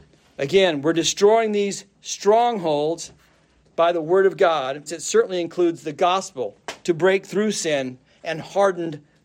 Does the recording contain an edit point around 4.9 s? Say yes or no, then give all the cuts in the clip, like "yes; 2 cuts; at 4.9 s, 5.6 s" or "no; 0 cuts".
yes; 1 cut; at 4.9 s